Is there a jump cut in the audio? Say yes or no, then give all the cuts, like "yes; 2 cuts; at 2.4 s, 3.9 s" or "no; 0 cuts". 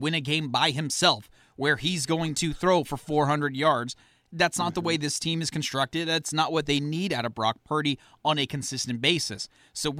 no; 0 cuts